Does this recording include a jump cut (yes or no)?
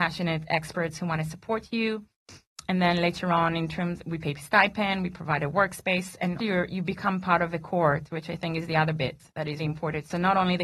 yes